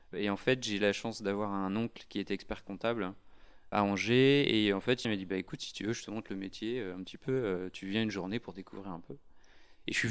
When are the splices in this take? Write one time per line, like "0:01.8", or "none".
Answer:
0:05.0

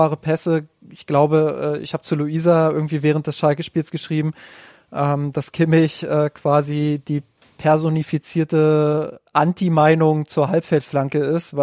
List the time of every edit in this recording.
none

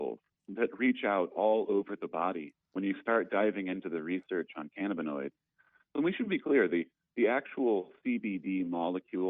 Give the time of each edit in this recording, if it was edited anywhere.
none

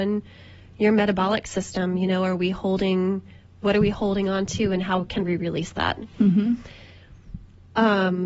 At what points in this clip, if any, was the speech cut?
none

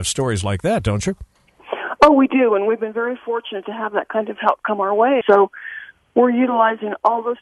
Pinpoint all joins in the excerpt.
0:05.2

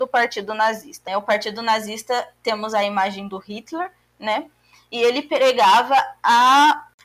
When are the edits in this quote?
0:01.1

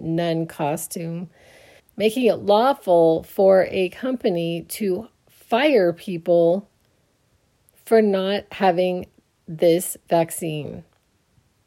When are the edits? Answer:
0:01.8

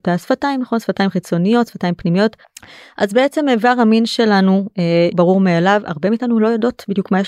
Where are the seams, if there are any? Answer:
0:02.4
0:05.1

